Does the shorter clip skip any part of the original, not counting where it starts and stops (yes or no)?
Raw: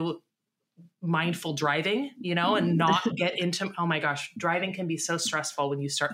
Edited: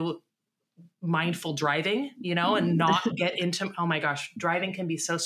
no